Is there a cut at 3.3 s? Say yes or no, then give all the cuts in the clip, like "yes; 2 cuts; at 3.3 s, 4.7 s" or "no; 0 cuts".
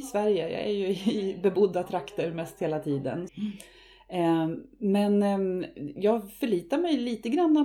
yes; 1 cut; at 3.3 s